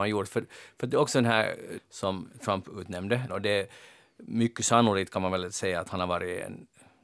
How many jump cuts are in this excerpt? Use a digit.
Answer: 2